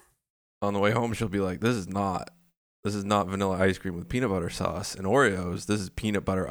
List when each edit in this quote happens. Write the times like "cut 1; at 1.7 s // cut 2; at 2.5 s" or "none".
none